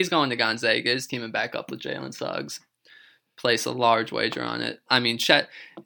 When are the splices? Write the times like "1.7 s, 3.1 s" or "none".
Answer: 4.9 s